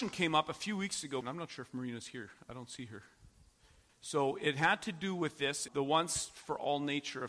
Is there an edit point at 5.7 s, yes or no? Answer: yes